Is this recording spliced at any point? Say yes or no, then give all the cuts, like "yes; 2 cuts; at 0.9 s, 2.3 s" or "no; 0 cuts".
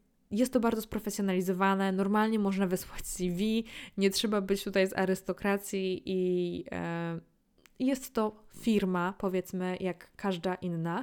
no; 0 cuts